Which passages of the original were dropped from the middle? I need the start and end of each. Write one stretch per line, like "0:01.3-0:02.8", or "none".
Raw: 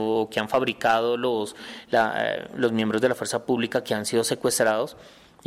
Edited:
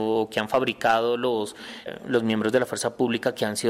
0:01.9-0:02.3